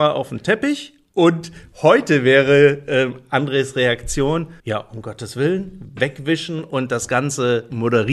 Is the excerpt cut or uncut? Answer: cut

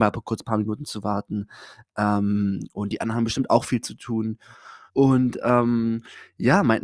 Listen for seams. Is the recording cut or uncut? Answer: cut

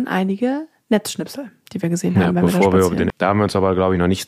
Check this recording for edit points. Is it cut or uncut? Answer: cut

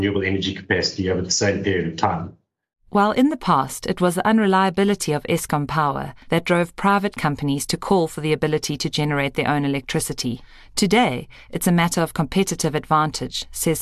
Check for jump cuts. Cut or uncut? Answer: uncut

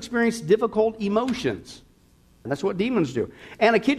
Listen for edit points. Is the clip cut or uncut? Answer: cut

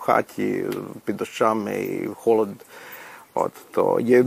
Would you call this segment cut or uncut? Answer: uncut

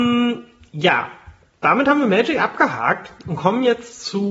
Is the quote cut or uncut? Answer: uncut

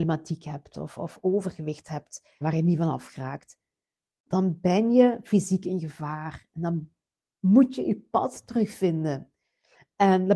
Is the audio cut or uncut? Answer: cut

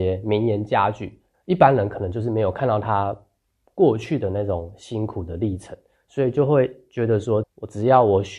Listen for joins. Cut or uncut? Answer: cut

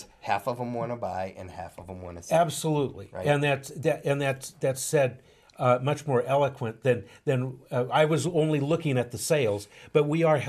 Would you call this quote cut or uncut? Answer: uncut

